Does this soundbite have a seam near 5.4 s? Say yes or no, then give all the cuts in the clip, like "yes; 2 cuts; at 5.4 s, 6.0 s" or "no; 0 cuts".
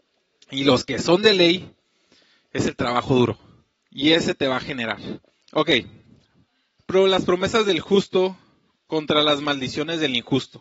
yes; 1 cut; at 5.4 s